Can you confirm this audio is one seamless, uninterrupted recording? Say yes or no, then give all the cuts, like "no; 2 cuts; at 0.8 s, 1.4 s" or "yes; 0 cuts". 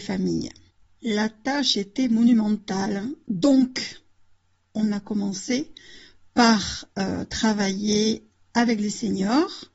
yes; 0 cuts